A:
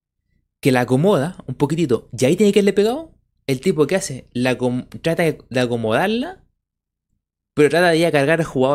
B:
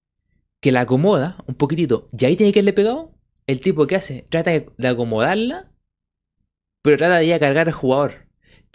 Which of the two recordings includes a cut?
B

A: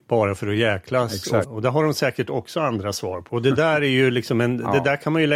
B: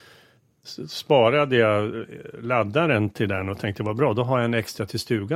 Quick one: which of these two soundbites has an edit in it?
A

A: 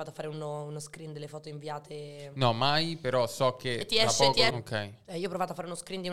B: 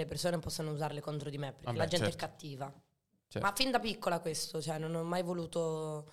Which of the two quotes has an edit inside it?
A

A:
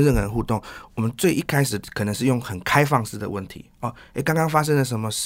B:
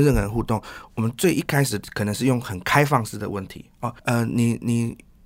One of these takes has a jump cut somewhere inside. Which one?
B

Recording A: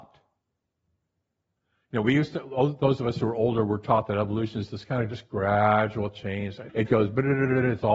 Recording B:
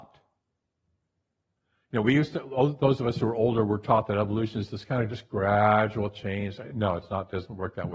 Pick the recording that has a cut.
A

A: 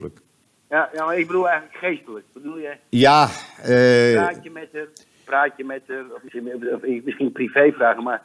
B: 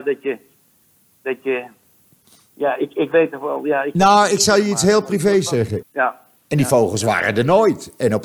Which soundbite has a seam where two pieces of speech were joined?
B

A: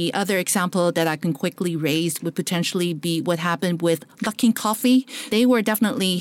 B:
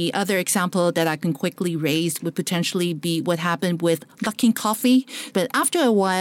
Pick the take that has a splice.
B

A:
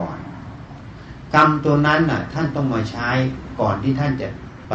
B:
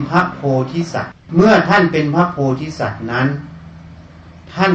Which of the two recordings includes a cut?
B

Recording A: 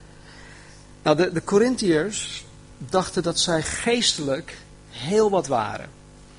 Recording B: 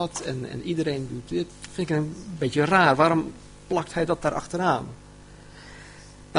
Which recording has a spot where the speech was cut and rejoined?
B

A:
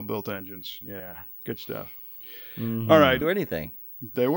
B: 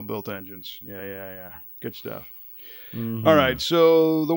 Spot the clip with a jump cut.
A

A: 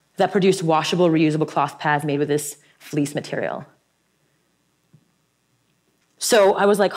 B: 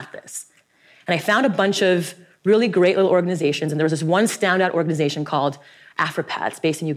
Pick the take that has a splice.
A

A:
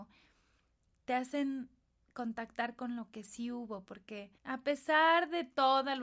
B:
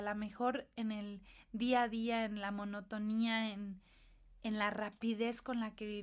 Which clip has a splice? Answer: A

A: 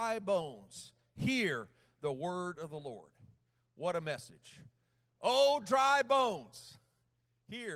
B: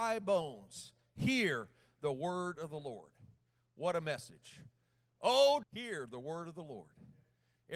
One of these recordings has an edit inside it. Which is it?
B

